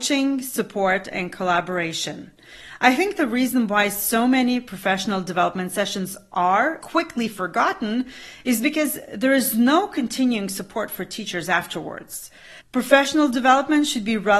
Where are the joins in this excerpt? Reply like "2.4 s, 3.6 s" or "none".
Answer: 6.8 s, 12.6 s